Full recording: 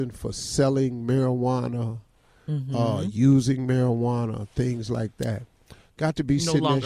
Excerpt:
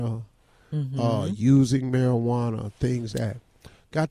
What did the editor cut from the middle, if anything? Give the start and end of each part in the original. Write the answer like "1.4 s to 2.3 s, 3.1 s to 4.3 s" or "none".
4.9 s to 5.2 s

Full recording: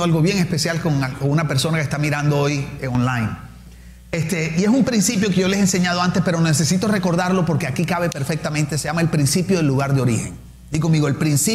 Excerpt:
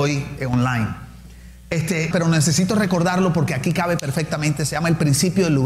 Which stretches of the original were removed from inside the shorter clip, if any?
4.5 s to 6.2 s

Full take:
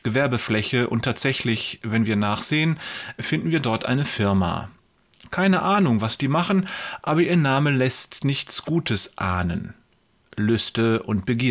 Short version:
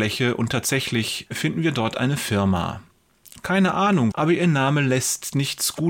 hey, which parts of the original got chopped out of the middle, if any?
1.8 s to 3.1 s, 6.0 s to 7.0 s

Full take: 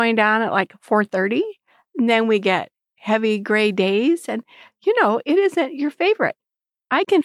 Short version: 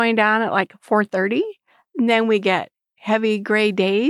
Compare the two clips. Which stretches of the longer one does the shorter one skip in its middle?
none

